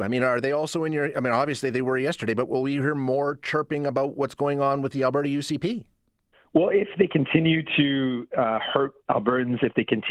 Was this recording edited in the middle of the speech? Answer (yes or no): no